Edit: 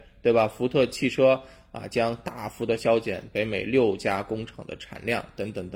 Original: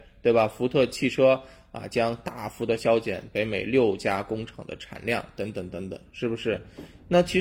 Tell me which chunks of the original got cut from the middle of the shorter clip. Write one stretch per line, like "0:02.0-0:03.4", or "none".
none